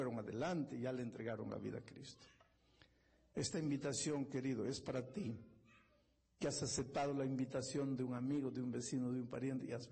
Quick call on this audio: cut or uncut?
uncut